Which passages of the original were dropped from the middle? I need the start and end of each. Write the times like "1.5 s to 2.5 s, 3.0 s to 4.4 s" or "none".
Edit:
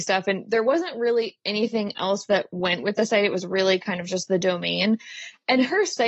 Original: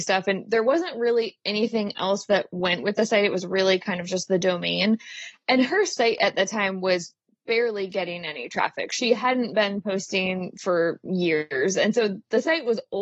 none